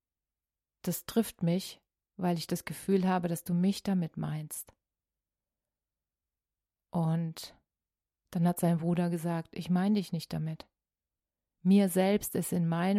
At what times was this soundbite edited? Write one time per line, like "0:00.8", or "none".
none